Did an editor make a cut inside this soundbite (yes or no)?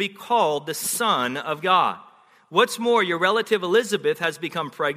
no